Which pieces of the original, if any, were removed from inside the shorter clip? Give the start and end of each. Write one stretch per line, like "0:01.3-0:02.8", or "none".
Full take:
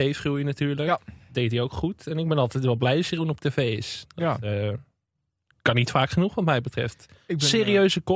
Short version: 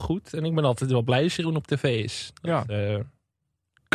none